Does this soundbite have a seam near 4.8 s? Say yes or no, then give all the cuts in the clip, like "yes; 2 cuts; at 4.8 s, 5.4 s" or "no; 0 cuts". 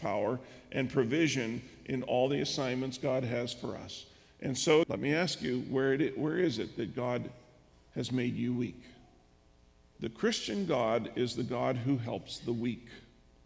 yes; 2 cuts; at 4.8 s, 9.9 s